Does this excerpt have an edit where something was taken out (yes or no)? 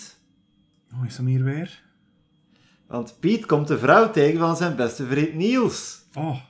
no